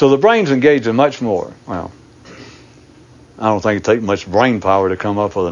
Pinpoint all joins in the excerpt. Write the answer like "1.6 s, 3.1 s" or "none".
1.6 s